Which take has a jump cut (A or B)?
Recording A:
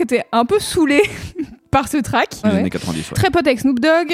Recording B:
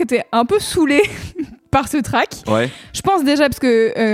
A